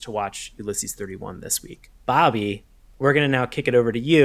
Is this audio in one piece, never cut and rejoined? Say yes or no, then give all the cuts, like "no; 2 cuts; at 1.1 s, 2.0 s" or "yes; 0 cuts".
no; 1 cut; at 1.9 s